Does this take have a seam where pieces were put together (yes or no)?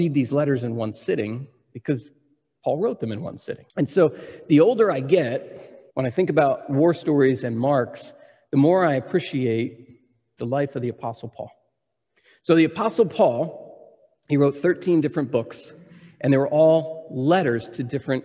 yes